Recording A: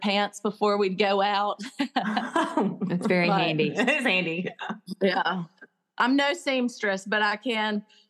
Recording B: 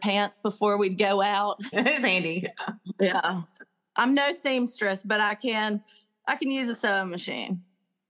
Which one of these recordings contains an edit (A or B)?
B